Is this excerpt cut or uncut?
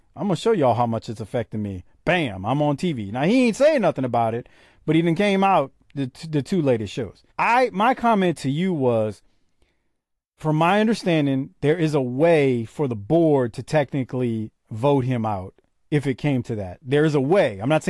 cut